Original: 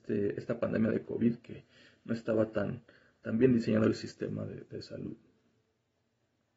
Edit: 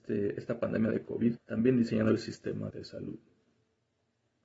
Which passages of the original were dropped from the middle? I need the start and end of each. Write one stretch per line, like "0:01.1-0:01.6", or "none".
0:01.4-0:03.1
0:04.5-0:04.7